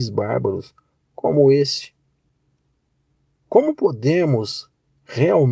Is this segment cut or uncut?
uncut